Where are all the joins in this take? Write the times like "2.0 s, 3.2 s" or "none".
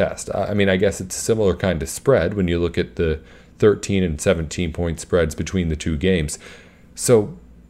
none